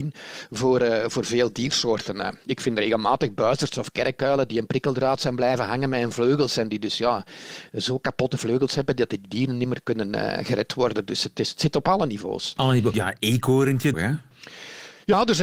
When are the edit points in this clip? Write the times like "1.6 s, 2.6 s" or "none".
12.9 s, 13.9 s